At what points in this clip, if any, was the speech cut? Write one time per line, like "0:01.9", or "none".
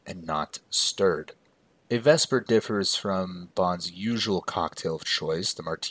0:01.9

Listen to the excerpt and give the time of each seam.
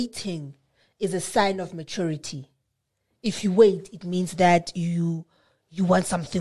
none

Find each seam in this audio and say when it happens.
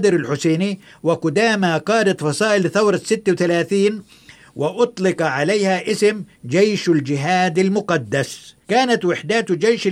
0:08.6

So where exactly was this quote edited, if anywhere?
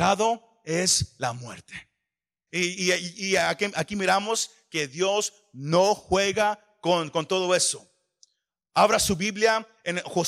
0:02.5

